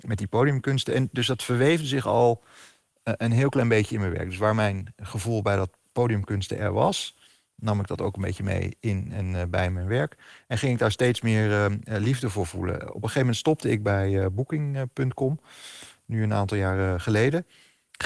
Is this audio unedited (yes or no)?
yes